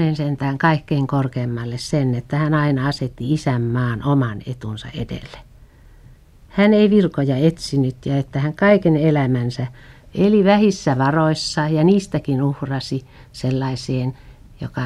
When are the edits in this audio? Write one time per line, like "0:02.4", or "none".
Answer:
none